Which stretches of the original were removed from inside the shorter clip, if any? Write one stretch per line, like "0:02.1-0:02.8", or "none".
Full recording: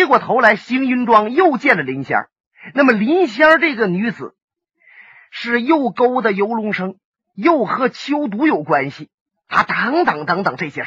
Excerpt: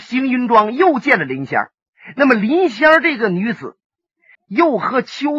0:04.9-0:07.2